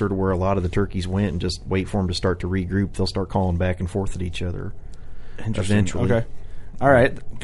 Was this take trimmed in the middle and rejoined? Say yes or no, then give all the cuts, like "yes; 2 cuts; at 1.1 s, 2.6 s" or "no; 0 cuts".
no; 0 cuts